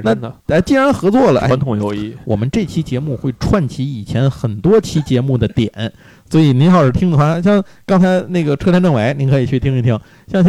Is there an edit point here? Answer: no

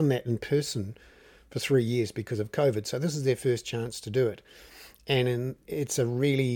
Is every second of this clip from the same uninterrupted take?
yes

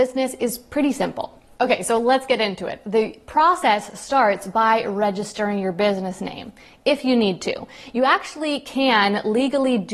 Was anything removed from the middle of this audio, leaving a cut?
no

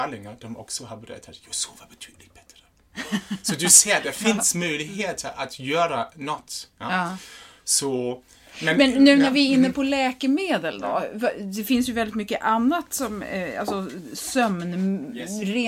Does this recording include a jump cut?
no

